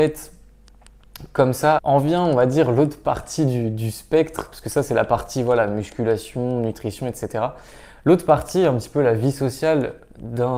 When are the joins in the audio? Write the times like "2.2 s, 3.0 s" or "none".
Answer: 1.8 s